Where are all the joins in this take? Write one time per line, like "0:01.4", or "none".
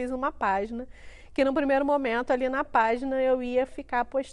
none